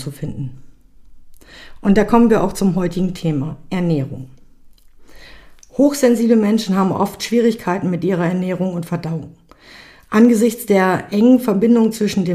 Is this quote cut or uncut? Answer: uncut